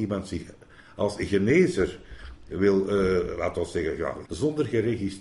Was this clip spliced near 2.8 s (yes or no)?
no